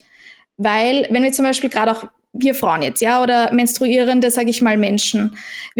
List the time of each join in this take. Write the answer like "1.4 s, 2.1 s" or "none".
none